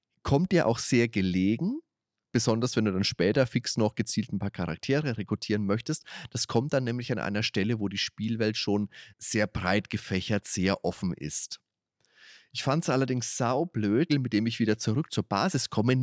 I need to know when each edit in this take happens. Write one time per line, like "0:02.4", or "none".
0:09.1
0:14.1